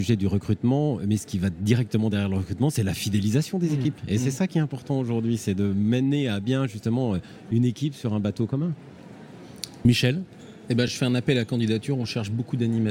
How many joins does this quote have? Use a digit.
0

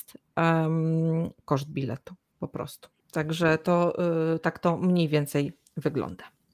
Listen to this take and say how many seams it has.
1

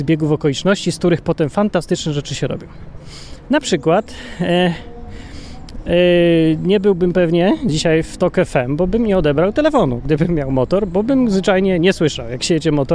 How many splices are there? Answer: 0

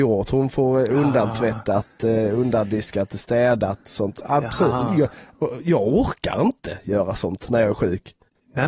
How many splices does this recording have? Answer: 0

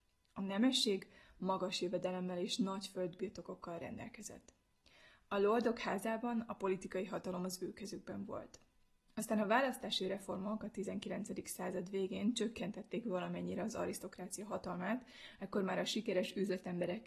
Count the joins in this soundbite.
0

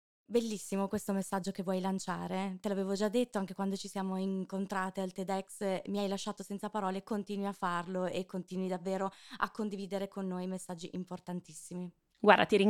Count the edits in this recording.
0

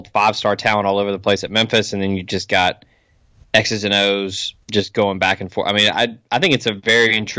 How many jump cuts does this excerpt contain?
1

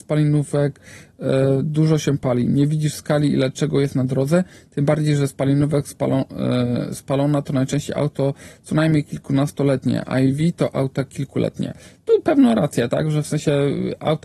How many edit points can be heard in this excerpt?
0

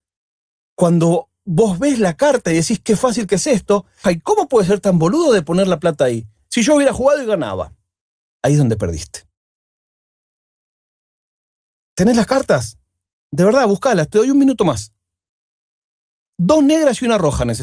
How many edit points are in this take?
1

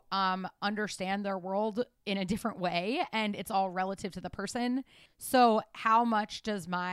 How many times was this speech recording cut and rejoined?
1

